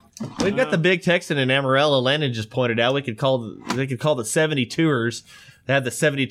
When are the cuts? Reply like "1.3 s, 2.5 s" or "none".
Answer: none